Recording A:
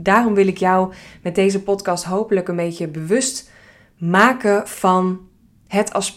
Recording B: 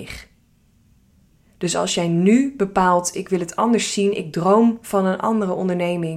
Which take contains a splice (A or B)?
B